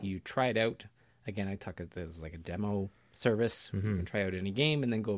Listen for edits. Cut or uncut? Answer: uncut